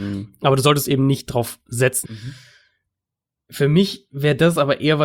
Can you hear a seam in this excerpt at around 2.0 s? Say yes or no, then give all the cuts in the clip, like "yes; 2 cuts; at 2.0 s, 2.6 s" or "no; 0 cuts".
yes; 1 cut; at 2.0 s